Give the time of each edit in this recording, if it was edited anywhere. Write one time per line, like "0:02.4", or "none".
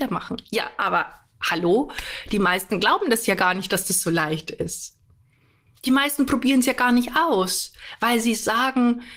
none